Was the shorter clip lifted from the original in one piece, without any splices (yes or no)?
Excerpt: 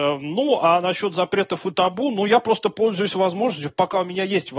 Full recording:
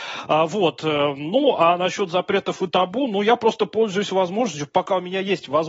yes